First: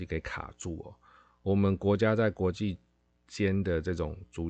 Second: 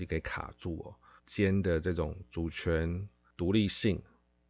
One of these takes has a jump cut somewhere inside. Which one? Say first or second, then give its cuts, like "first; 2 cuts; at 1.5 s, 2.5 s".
second; 1 cut; at 1.2 s